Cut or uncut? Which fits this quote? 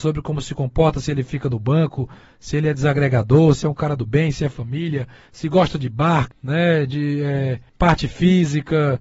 cut